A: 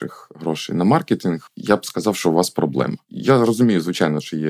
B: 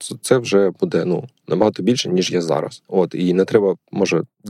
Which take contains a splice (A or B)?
B